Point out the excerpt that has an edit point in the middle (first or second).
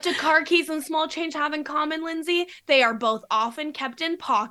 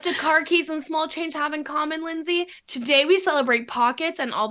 second